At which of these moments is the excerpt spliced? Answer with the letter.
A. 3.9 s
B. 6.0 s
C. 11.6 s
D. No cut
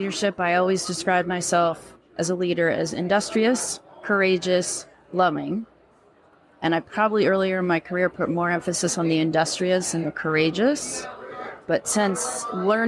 D